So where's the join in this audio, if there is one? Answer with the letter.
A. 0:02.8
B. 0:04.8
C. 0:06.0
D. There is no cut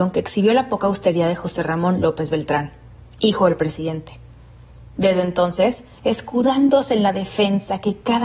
C